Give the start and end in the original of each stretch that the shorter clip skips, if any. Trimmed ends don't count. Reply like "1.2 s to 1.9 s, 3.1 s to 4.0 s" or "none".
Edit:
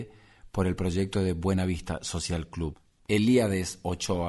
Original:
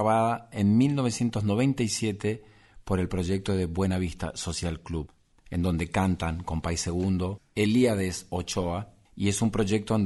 5.4 s to 7.5 s